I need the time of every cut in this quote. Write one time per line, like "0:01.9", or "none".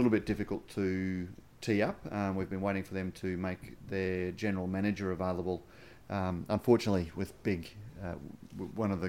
none